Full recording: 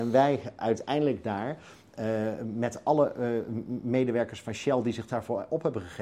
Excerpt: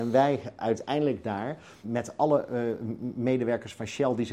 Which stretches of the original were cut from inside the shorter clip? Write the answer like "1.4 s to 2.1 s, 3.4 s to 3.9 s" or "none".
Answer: 1.8 s to 2.5 s